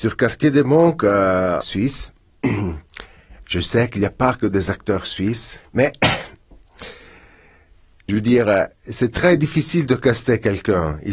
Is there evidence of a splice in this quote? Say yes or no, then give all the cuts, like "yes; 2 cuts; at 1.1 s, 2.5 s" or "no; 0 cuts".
yes; 2 cuts; at 1.6 s, 5.6 s